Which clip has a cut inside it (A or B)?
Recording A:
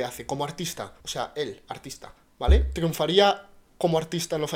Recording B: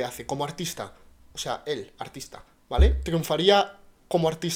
A